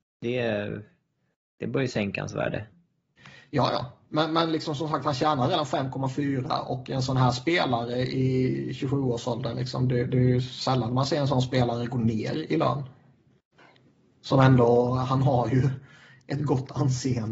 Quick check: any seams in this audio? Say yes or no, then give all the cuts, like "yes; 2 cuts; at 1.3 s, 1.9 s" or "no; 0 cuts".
no; 0 cuts